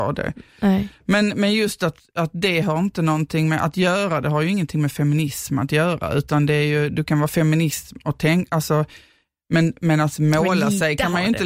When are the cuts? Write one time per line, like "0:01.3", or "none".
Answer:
none